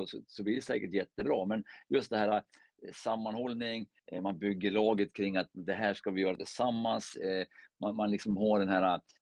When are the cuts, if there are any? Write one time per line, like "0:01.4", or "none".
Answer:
none